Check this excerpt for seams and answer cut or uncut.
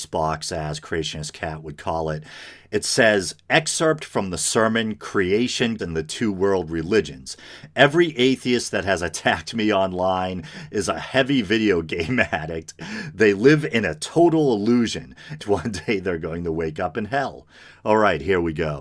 cut